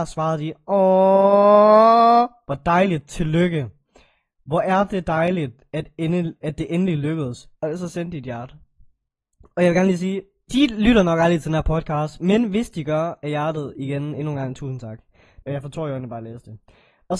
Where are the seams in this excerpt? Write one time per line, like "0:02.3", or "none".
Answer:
0:07.6
0:10.5
0:15.4